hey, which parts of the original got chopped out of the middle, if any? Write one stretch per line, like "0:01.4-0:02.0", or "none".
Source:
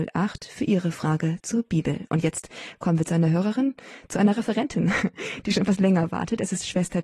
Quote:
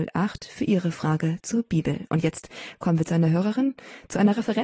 none